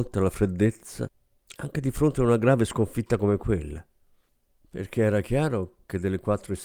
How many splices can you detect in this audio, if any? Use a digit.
1